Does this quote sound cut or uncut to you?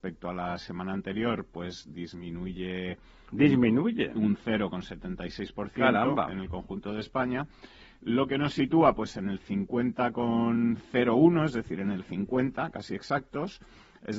uncut